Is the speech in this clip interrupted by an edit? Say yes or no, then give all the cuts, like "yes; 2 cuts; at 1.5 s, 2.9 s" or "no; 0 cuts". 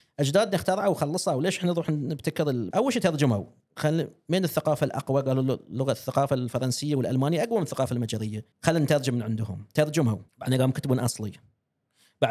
yes; 3 cuts; at 2.7 s, 8.5 s, 10.3 s